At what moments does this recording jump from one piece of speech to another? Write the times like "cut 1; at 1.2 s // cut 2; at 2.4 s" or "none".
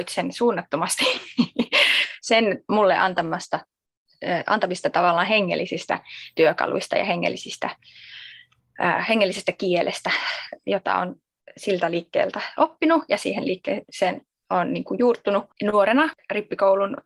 none